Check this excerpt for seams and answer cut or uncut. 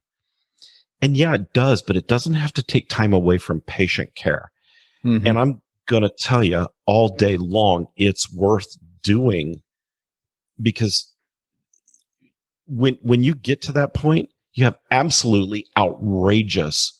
uncut